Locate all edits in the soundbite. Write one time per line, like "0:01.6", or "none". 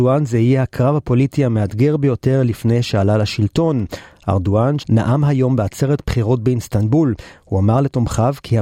0:04.8